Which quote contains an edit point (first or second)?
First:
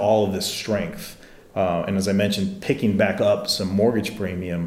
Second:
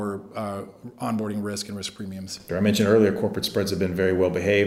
second